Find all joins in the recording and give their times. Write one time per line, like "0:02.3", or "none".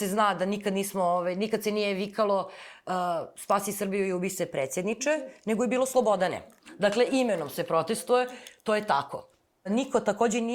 none